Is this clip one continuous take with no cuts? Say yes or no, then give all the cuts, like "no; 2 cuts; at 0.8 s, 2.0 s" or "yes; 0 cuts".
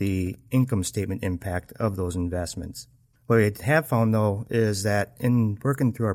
no; 1 cut; at 3.1 s